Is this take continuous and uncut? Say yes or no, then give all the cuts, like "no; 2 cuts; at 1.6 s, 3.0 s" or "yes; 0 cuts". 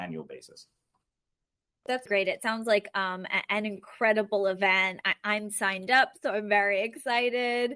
no; 1 cut; at 2.1 s